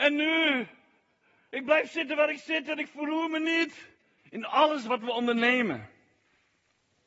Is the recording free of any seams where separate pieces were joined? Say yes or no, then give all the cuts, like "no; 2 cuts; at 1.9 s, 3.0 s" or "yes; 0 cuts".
no; 1 cut; at 4.2 s